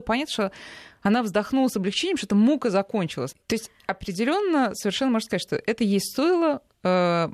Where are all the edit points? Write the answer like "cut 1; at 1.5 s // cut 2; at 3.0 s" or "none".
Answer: cut 1; at 3.3 s